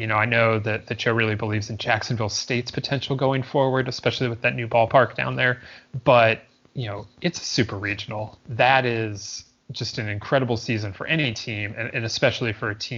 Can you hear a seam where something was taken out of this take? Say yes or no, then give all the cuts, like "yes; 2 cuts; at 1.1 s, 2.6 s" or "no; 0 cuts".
yes; 1 cut; at 8.4 s